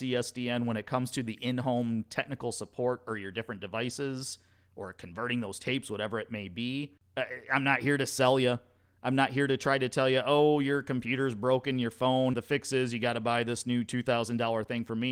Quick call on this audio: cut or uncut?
cut